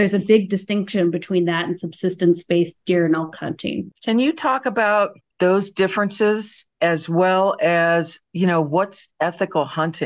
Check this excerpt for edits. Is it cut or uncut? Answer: uncut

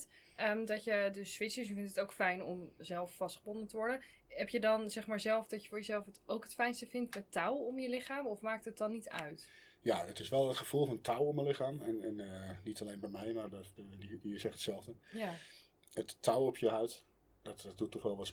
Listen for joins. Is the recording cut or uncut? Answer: cut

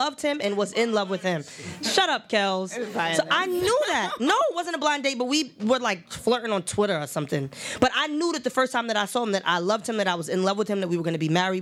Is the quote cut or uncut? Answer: uncut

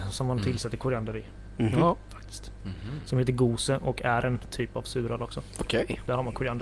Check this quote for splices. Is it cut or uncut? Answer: uncut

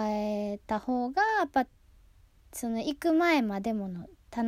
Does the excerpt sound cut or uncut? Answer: uncut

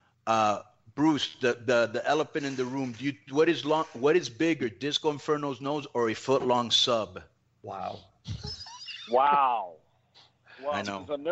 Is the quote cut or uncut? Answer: uncut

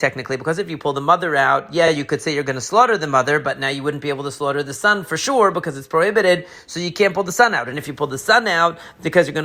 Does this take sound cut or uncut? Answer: uncut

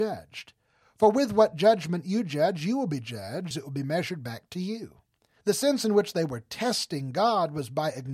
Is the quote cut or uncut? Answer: cut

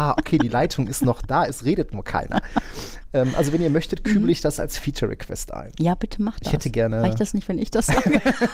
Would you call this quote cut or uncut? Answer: uncut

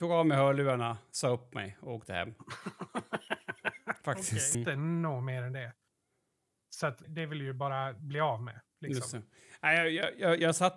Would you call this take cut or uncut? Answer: cut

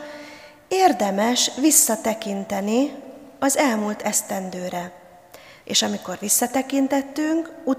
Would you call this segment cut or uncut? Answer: cut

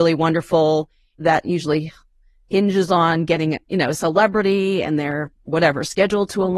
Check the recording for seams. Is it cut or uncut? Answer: cut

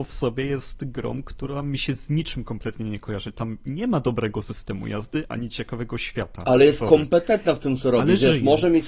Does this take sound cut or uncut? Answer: uncut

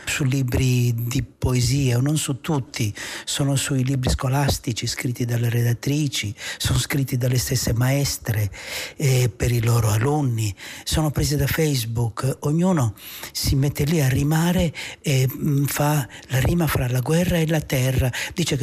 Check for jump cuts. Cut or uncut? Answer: uncut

